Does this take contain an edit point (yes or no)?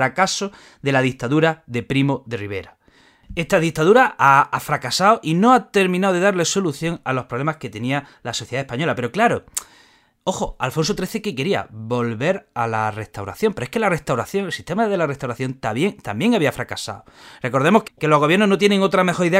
yes